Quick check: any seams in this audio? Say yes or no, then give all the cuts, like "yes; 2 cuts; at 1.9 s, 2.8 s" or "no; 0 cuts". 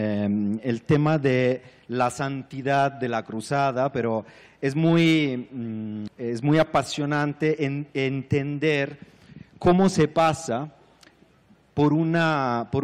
yes; 1 cut; at 6.1 s